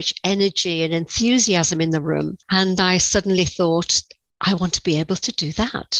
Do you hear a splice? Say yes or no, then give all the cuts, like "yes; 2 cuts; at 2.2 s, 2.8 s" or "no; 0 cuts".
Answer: no; 0 cuts